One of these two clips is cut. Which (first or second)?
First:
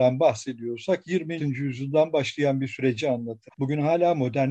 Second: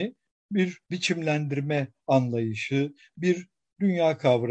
first